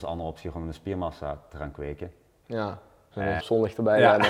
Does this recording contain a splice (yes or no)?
yes